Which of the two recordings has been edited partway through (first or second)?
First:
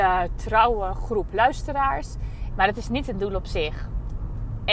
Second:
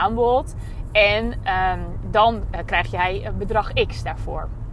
first